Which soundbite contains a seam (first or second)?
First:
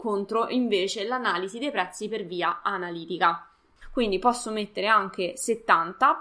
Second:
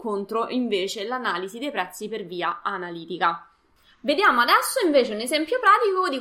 first